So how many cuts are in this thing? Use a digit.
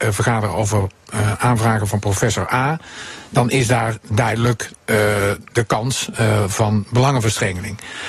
0